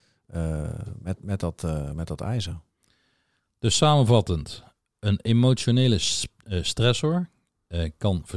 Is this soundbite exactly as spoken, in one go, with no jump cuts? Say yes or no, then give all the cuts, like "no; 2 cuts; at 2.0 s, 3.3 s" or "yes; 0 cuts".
yes; 0 cuts